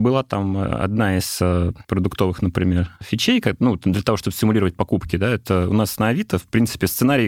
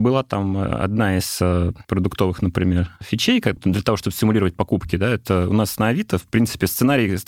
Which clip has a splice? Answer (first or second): second